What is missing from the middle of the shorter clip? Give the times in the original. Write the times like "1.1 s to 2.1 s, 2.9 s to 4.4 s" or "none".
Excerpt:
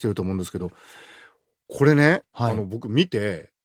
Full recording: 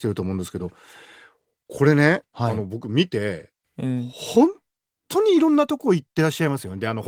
none